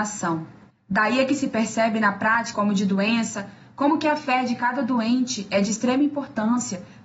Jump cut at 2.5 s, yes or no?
yes